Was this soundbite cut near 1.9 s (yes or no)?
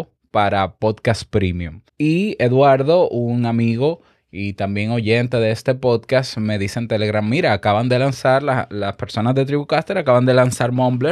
yes